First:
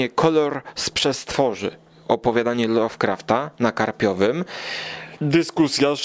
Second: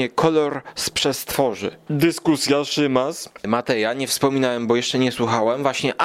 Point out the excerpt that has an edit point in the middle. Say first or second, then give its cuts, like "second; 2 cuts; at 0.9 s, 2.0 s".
second; 1 cut; at 1.9 s